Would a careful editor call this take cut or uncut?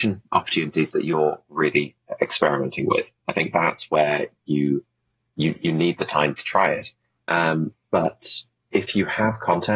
cut